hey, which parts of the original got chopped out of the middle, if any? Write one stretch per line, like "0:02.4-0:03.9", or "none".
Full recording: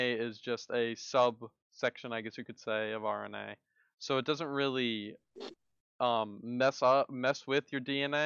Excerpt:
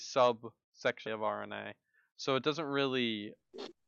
0:02.0-0:02.9